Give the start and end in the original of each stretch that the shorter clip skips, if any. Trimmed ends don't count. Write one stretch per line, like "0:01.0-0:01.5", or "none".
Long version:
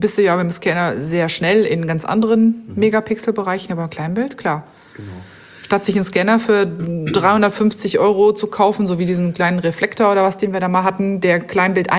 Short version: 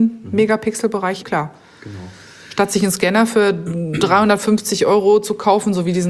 0:03.7-0:04.4